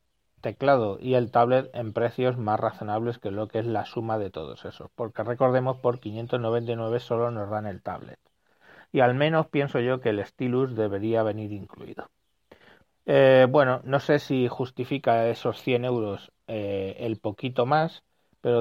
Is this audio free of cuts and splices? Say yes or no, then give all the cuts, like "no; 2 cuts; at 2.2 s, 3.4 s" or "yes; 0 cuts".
no; 1 cut; at 12.8 s